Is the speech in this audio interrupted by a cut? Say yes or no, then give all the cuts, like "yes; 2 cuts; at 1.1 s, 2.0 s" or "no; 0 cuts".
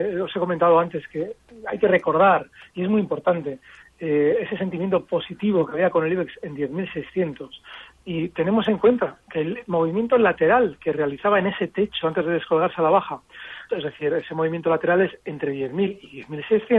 yes; 2 cuts; at 12.0 s, 13.7 s